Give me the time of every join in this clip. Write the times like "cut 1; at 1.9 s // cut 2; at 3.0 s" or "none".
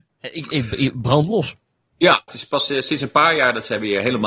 none

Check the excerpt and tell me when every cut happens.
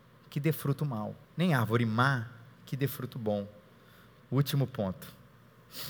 cut 1; at 1.2 s // cut 2; at 4.2 s

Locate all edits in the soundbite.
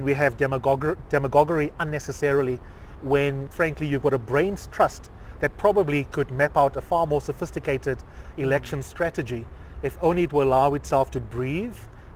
cut 1; at 3.5 s

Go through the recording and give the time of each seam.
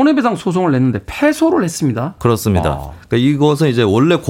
cut 1; at 2.2 s

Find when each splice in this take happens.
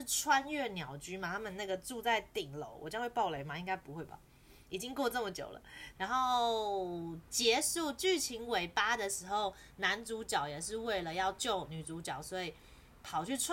cut 1; at 5.9 s

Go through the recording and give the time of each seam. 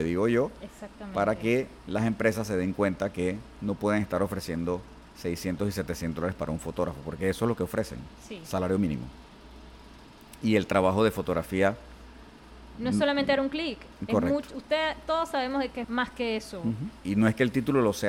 cut 1; at 15.8 s // cut 2; at 17.0 s

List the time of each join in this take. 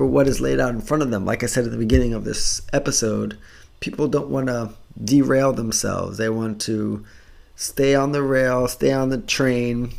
none

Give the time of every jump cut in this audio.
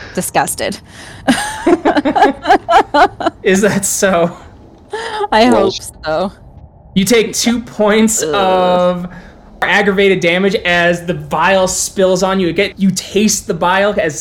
cut 1; at 12.7 s

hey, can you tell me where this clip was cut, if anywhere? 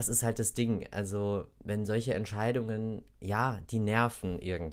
none

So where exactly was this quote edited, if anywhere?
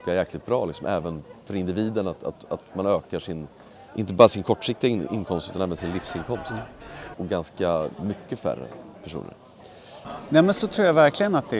cut 1; at 3.9 s // cut 2; at 7.1 s // cut 3; at 10.0 s

